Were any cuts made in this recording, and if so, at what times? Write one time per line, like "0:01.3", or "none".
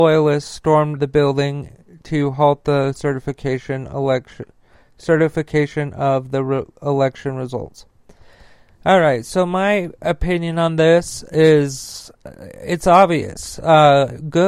0:01.0

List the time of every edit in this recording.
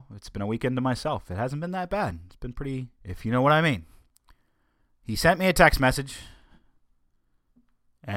0:03.0

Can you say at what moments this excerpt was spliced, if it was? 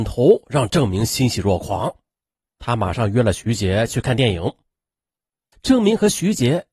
0:05.5

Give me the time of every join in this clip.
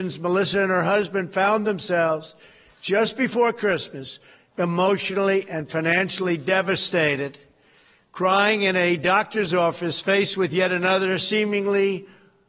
none

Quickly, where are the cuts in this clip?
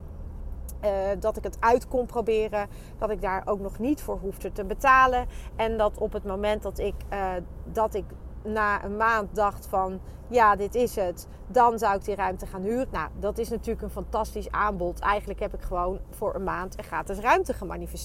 0:12.9

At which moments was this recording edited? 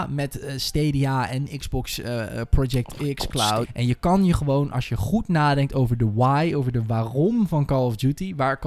0:03.6

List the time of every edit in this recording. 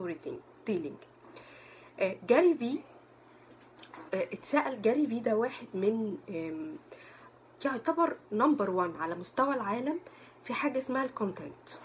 0:04.1

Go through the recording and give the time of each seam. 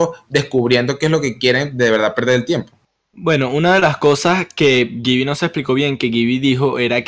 none

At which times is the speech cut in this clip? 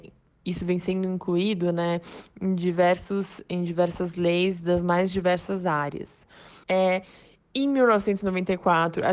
0:06.6

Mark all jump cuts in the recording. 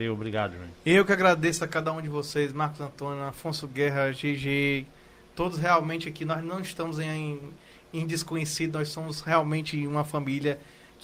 none

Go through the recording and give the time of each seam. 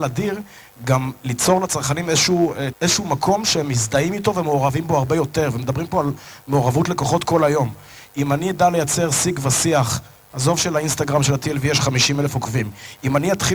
0:02.7

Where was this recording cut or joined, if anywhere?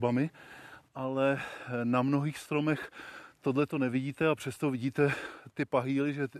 0:05.5

